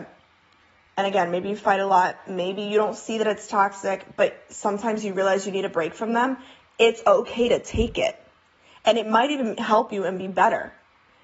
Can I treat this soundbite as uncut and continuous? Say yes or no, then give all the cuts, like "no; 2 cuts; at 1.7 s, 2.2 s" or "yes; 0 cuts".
yes; 0 cuts